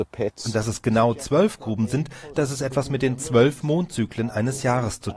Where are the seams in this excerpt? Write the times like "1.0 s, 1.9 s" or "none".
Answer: 2.3 s